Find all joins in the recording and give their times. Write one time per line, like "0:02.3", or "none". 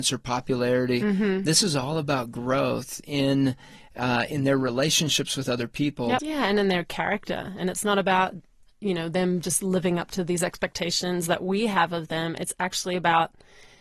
0:06.2

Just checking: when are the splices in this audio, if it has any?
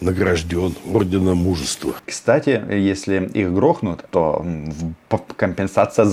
0:02.0
0:04.1

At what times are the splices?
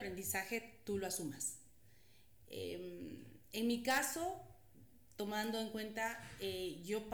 none

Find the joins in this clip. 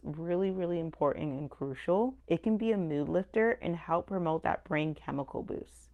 0:02.2

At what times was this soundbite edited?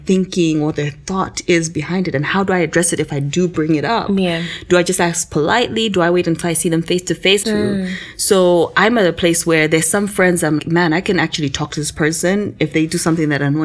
0:07.4
0:10.6

